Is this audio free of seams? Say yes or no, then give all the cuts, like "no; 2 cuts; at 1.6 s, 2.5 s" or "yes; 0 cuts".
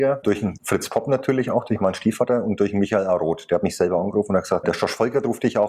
yes; 0 cuts